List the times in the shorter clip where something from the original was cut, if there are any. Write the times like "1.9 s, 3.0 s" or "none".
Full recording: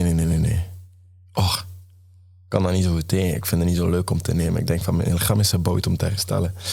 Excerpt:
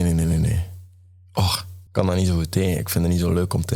1.9 s